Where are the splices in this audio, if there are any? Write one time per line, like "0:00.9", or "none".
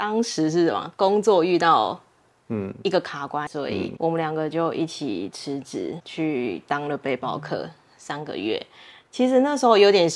0:03.5